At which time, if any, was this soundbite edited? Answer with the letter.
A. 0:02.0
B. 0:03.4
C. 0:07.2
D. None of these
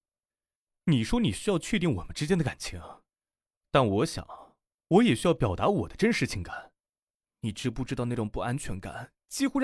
C